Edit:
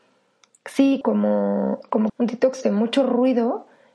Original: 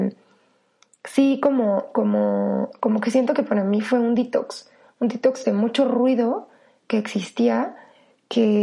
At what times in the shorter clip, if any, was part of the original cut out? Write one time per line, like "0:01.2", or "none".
0:01.0
0:02.1